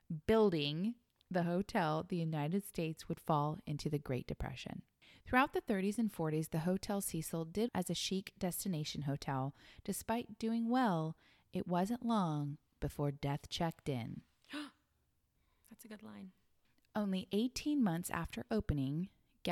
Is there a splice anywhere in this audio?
yes; 1 cut; at 7.7 s

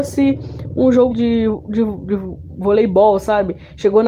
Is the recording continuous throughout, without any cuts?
no; 1 cut; at 1.1 s

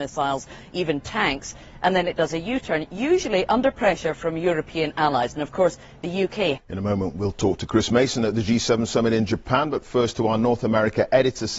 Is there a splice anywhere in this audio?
yes; 1 cut; at 6.5 s

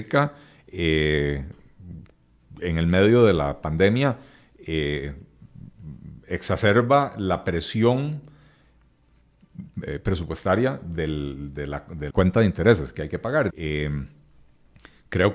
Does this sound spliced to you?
yes; 2 cuts; at 12.1 s, 13.5 s

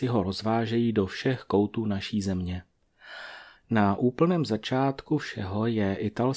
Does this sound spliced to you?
yes; 1 cut; at 3.6 s

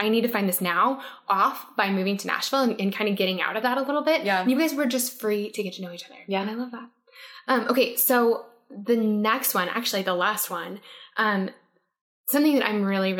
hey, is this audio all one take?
yes; 0 cuts

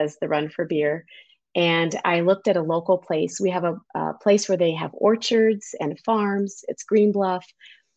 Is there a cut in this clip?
no; 0 cuts

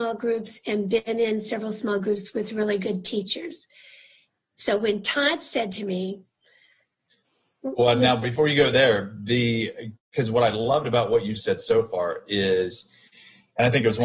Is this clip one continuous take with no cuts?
yes; 0 cuts

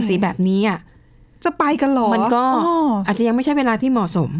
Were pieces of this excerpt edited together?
no; 0 cuts

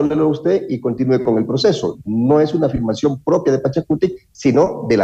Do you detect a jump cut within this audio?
no; 0 cuts

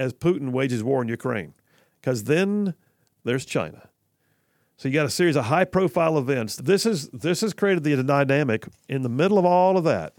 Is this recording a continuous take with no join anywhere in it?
no; 1 cut; at 6.6 s

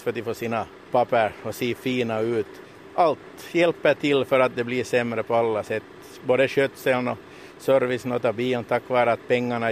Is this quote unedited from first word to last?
yes; 0 cuts

